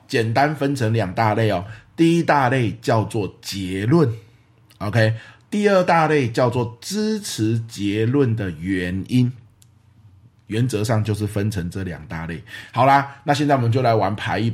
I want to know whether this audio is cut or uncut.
uncut